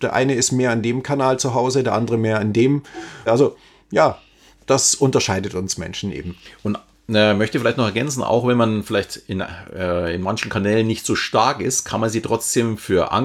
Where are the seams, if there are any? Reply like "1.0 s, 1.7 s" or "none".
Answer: 3.3 s